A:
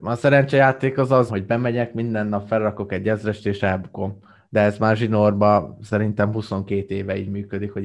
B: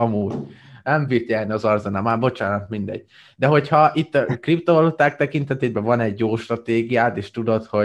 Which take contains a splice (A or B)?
A